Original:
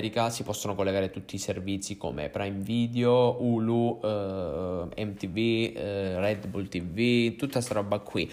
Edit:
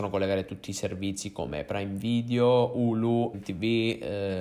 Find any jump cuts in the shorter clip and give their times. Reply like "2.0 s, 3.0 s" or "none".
3.3 s